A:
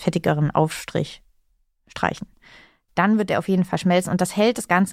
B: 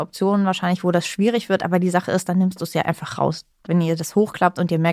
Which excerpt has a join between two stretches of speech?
B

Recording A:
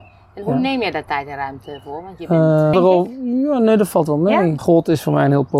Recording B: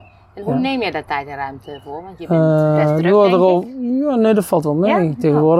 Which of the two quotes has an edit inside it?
A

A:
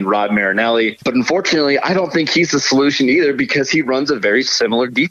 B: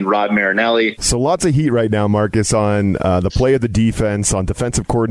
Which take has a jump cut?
B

